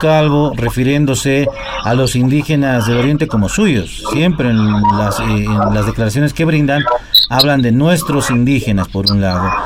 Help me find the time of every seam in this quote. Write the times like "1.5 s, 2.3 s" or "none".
none